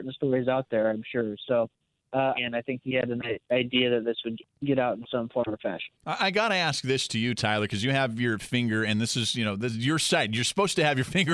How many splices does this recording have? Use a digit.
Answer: 1